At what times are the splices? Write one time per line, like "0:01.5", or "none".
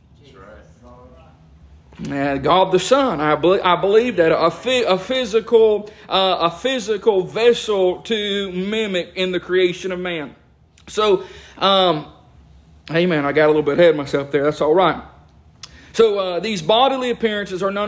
none